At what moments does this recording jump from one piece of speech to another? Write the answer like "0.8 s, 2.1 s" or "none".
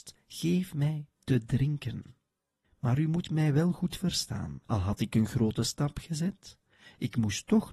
2.6 s, 4.6 s